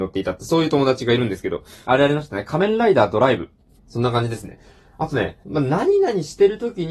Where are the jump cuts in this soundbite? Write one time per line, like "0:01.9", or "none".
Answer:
0:01.8
0:03.8
0:05.4